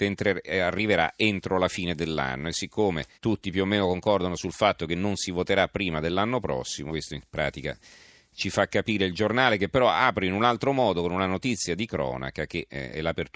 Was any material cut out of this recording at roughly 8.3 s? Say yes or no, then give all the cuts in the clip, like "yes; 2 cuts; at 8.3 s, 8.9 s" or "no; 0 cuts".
no; 2 cuts; at 3.1 s, 6.9 s